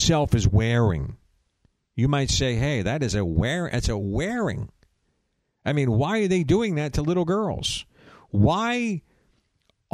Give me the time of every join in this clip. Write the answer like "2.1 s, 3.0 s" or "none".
none